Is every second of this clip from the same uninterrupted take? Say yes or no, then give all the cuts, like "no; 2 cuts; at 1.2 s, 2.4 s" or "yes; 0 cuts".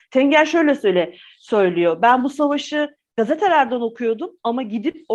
yes; 0 cuts